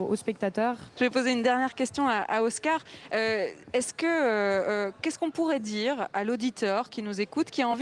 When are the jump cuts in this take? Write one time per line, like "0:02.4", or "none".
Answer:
0:00.9